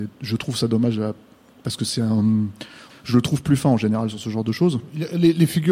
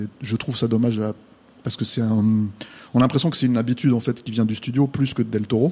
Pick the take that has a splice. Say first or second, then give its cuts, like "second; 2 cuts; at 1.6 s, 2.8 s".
first; 1 cut; at 2.9 s